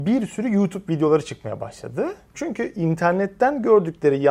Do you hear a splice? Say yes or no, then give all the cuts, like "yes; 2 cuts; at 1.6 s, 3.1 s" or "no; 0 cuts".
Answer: yes; 1 cut; at 2.3 s